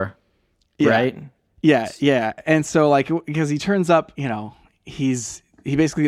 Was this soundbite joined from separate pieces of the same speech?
yes; 1 cut; at 4.1 s

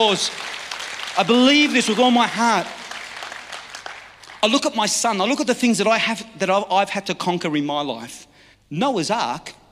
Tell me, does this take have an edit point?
yes; 1 cut; at 8.5 s

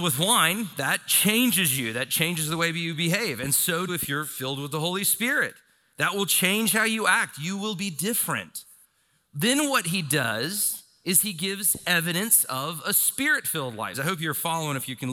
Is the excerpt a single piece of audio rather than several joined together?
no; 2 cuts; at 3.9 s, 13.9 s

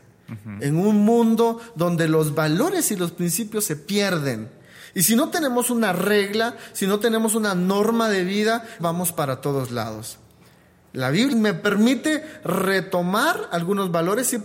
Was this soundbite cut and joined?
yes; 2 cuts; at 8.8 s, 11.3 s

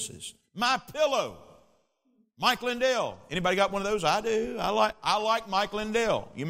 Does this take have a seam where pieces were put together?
no; 0 cuts

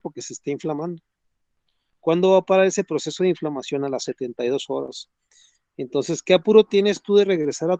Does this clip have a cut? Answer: no; 0 cuts

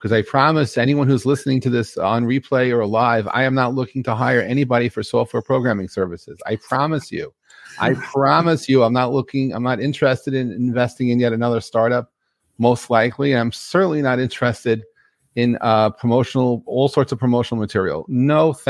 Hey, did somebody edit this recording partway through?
no; 0 cuts

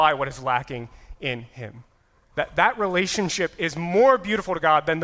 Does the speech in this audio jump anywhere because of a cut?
no; 0 cuts

